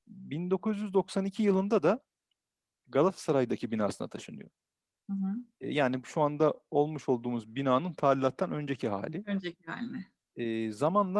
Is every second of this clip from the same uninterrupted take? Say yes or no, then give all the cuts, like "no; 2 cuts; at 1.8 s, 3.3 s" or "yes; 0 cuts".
no; 1 cut; at 10.3 s